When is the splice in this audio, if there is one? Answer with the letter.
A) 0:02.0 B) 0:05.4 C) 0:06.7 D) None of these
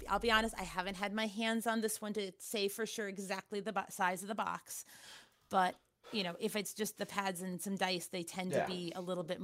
D